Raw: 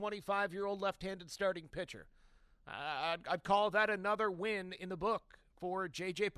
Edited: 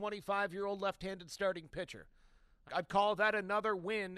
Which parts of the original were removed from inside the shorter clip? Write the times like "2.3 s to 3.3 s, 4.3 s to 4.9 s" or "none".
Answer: 2.7 s to 3.2 s